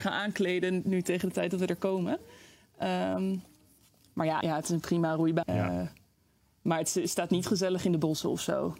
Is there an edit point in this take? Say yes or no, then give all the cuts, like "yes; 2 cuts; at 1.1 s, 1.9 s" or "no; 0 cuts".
yes; 2 cuts; at 4.4 s, 5.4 s